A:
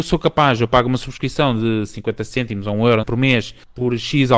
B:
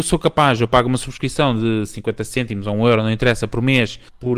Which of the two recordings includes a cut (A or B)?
A